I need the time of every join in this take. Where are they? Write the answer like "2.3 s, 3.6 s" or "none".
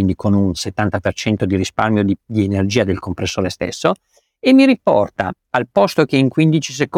none